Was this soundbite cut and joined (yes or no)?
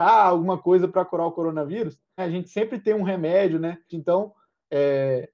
yes